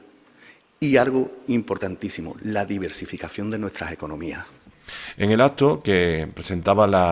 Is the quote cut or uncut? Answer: uncut